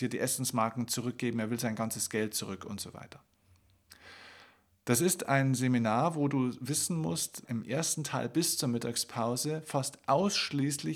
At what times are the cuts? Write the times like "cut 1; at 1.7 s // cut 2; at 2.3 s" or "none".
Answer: cut 1; at 7.4 s